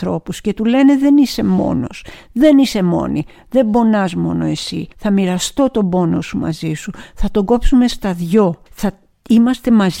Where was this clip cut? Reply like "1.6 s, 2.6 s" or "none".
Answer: 4.9 s, 8.7 s